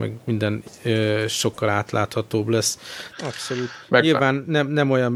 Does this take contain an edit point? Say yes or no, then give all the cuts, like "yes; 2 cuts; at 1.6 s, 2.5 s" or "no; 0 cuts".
yes; 1 cut; at 3.1 s